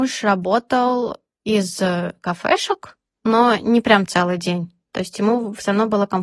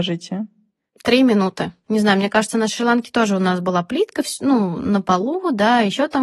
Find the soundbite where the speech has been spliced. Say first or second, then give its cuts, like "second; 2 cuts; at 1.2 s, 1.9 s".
second; 1 cut; at 1.8 s